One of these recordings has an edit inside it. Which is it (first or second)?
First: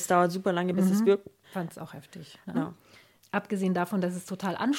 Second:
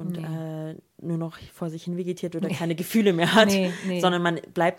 first